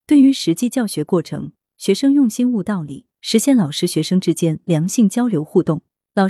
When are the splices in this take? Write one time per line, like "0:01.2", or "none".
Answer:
0:01.6